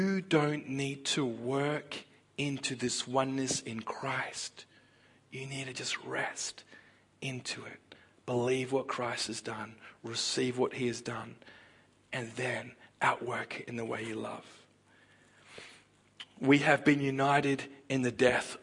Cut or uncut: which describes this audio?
uncut